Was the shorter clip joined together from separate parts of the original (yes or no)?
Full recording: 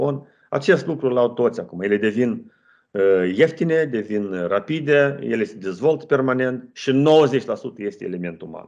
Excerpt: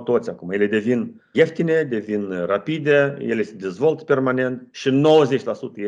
yes